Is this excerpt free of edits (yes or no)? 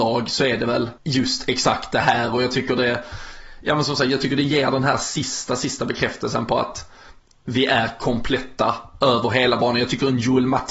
no